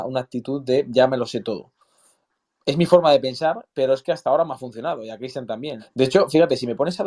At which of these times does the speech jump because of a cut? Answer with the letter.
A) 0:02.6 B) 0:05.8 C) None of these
B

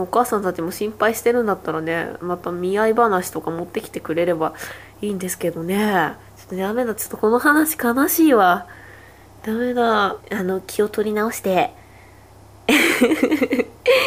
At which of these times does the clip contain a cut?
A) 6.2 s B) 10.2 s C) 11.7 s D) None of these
B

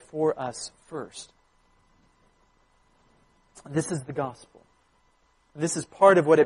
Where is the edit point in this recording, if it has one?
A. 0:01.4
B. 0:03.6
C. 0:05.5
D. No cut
D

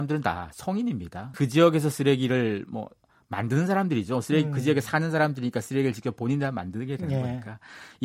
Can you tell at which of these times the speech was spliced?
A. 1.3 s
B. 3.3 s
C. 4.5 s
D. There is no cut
A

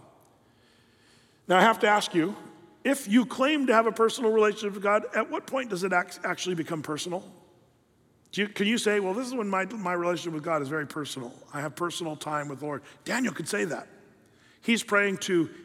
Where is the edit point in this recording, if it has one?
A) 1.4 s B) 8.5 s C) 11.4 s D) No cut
D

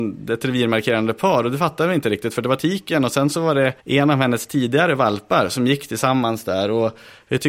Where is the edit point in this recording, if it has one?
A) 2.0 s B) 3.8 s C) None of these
B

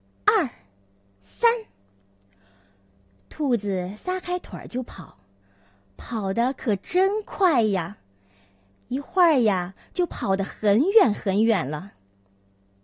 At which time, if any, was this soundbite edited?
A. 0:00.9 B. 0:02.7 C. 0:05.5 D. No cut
D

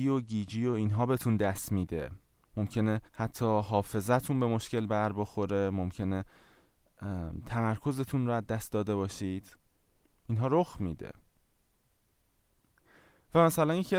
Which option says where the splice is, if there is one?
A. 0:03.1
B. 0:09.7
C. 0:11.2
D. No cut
A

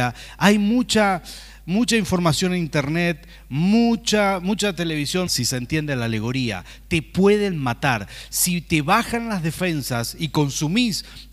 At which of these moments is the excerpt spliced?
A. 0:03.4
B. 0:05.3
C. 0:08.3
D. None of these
B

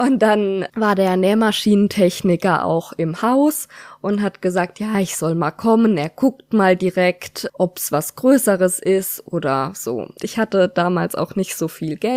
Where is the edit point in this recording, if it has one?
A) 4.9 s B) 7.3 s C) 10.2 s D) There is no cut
C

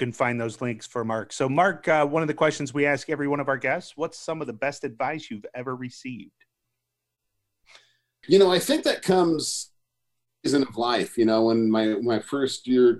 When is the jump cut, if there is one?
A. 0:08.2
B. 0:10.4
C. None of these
A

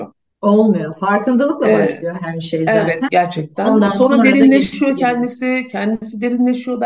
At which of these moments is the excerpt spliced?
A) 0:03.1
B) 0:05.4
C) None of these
A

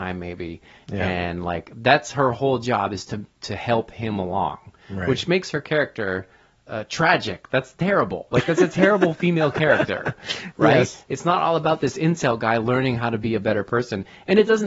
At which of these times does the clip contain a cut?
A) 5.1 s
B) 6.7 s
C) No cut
B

